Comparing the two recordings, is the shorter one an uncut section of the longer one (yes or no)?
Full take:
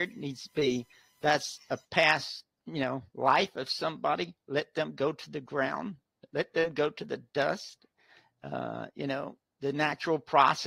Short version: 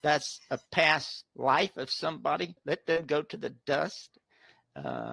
no